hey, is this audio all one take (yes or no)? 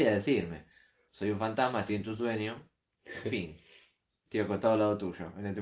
no